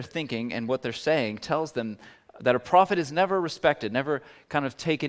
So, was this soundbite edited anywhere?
no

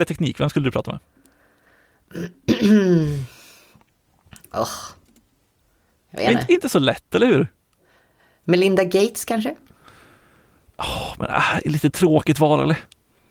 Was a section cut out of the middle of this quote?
no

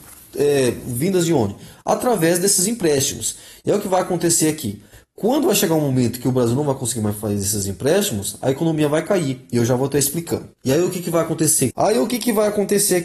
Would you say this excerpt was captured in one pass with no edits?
no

